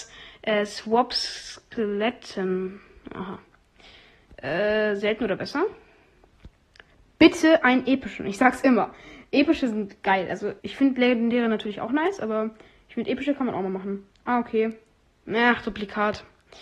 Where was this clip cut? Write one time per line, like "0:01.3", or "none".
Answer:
0:10.6